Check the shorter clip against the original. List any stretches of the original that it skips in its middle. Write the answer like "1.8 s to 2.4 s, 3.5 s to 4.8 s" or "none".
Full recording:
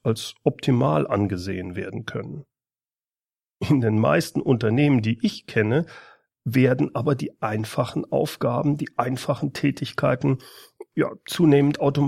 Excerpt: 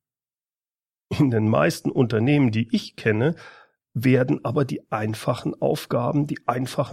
none

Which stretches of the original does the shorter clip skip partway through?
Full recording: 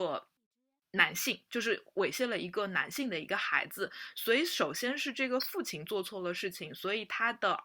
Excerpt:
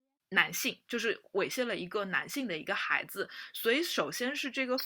none

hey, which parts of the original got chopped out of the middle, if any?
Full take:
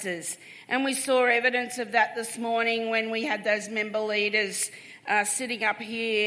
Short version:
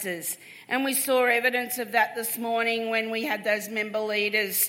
none

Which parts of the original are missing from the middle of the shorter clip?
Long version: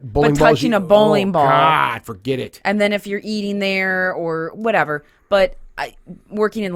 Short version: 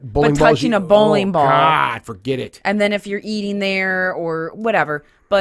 none

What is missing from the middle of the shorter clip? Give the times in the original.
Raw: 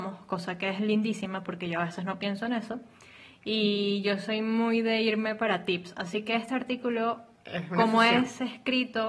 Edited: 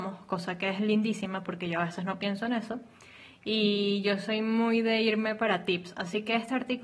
none

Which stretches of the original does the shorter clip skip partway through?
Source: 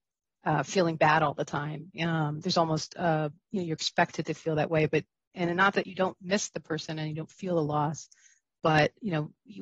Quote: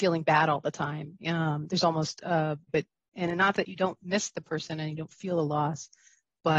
3.4 s to 4.9 s

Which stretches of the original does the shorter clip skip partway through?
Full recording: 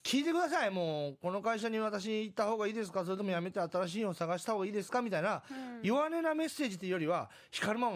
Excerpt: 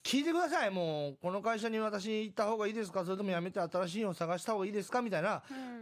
none

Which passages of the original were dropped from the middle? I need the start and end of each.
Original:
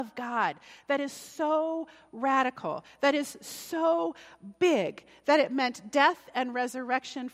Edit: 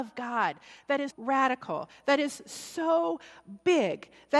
1.1 s to 2.1 s

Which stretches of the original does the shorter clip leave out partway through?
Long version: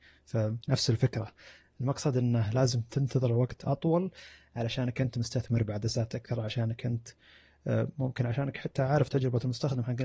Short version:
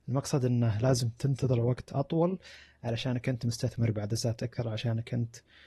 none

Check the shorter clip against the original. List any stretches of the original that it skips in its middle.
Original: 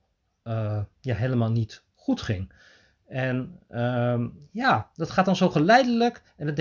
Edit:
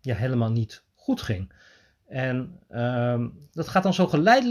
4.5 s to 4.9 s

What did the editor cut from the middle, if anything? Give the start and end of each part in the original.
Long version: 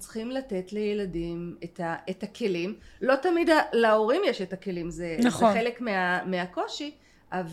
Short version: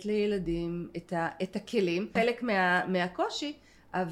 2.8 s to 5.5 s

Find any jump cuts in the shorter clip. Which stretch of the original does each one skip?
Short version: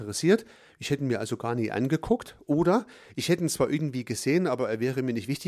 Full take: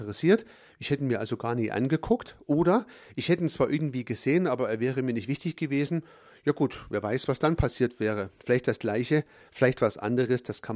none

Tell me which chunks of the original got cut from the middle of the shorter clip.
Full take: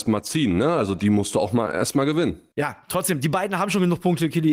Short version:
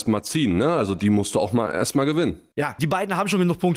2.8 s to 3.2 s

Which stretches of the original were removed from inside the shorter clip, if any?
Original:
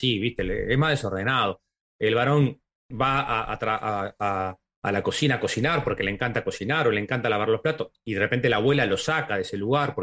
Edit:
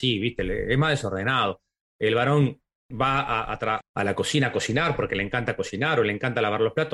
3.8 s to 4.7 s

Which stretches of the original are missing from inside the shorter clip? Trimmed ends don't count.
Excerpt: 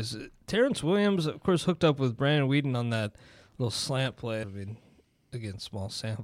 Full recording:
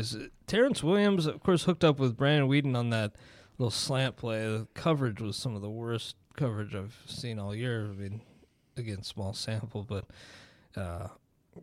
4.4 s to 7.9 s

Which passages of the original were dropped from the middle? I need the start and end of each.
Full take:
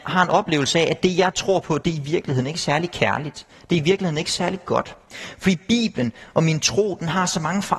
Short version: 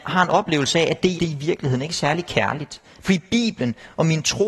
1.2 s to 1.8 s, 3.6 s to 5.4 s

